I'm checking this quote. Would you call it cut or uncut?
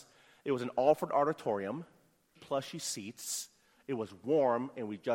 cut